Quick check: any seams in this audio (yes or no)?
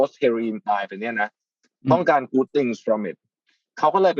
no